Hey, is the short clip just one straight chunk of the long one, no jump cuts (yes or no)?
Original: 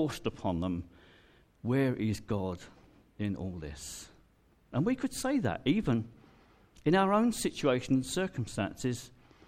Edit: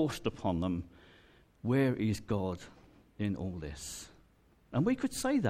yes